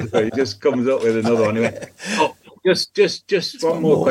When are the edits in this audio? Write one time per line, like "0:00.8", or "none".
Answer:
none